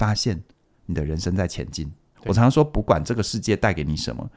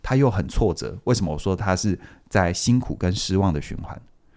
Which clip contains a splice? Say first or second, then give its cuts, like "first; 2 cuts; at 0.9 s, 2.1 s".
first; 1 cut; at 2.1 s